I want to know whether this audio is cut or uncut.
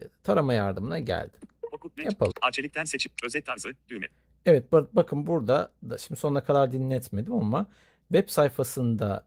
cut